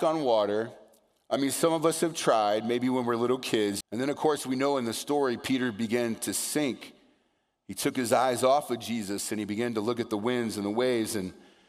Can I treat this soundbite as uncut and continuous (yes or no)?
no